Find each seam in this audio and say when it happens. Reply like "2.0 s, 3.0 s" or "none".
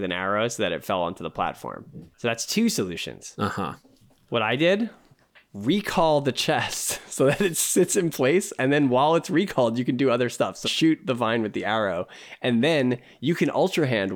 10.6 s